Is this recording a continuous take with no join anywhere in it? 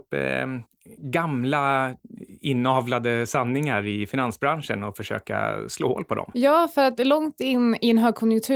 yes; 0 cuts

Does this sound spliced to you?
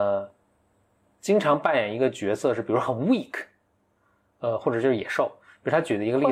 no; 0 cuts

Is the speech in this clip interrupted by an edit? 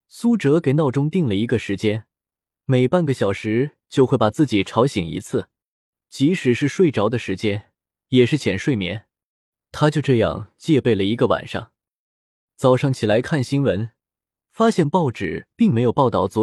no; 0 cuts

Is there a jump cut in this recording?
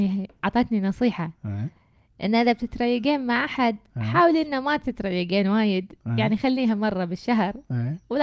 no; 0 cuts

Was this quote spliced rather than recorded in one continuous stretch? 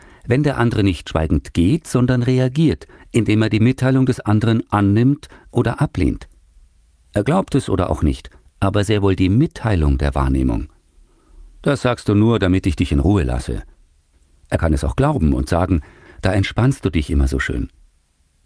yes; 2 cuts; at 8.5 s, 16.1 s

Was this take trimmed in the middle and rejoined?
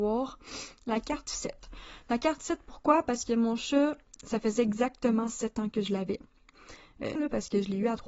yes; 2 cuts; at 4.2 s, 7.2 s

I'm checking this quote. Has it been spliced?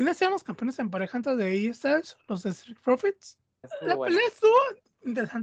yes; 1 cut; at 3.6 s

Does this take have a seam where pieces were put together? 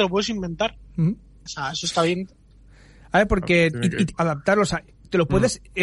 yes; 2 cuts; at 1.5 s, 4.1 s

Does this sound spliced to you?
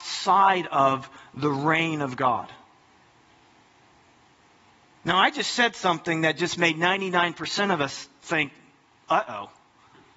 no; 0 cuts

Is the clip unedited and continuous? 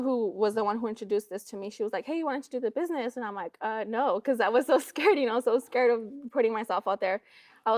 yes; 0 cuts

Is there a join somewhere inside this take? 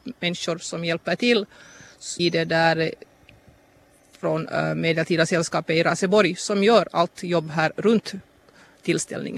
yes; 1 cut; at 2.2 s

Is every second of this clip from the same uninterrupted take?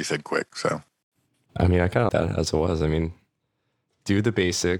no; 1 cut; at 2.1 s

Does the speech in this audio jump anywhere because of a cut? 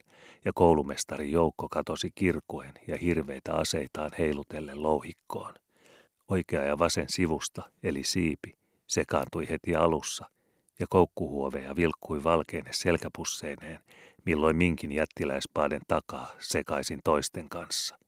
no; 0 cuts

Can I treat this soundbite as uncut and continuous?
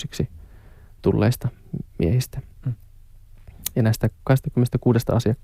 yes; 0 cuts

